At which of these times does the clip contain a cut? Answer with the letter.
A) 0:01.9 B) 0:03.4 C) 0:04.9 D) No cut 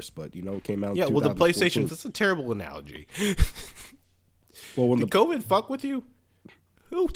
A